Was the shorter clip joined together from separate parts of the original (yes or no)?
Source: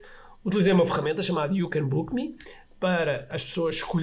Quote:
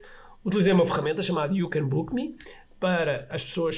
no